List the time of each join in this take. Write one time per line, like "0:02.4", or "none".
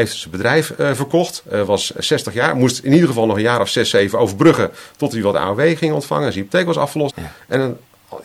0:07.1